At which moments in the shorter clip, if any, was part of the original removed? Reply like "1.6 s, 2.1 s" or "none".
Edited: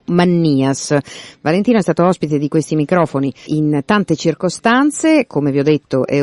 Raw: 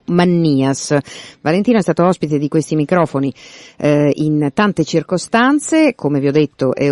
3.5 s